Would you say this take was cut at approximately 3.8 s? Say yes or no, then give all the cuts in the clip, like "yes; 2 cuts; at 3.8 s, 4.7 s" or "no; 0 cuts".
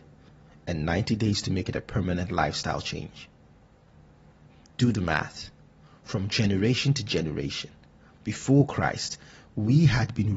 no; 0 cuts